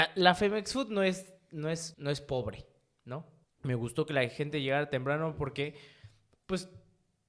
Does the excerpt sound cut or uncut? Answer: cut